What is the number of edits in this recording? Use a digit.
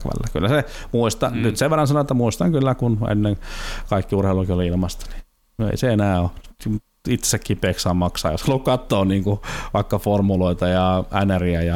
0